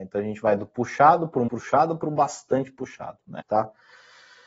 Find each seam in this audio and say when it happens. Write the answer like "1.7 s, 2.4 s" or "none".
1.5 s, 3.4 s